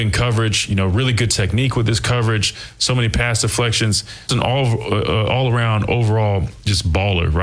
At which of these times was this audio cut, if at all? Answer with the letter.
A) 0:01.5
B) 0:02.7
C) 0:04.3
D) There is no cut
C